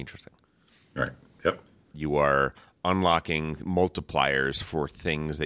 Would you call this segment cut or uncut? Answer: cut